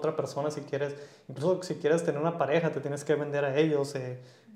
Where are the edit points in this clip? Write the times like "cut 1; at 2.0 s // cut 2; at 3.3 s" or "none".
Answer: none